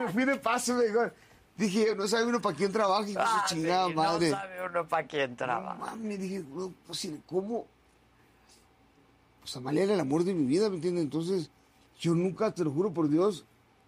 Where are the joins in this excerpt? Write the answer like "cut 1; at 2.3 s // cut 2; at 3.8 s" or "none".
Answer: none